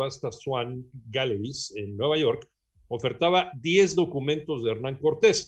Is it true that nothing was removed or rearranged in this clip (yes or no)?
yes